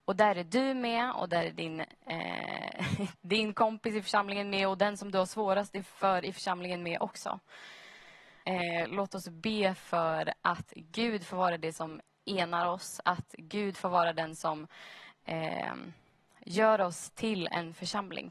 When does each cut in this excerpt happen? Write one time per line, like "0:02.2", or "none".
0:08.4